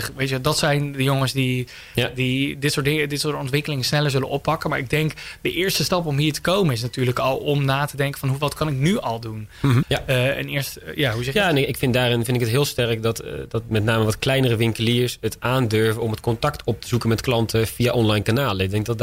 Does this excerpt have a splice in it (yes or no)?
yes